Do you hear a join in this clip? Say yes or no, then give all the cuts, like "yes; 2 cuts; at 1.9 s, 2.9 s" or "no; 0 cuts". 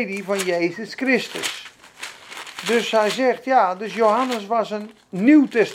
no; 0 cuts